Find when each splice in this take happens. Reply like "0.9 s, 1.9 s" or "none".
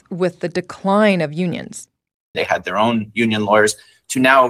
2.3 s